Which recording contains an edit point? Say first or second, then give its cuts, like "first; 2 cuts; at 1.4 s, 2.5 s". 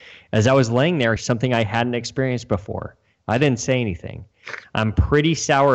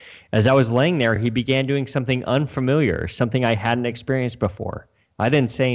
first; 2 cuts; at 1.2 s, 4.6 s